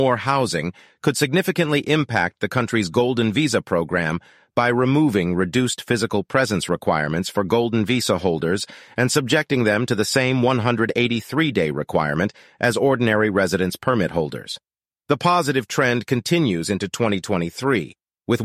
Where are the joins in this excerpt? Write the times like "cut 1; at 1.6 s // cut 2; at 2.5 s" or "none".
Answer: cut 1; at 14.9 s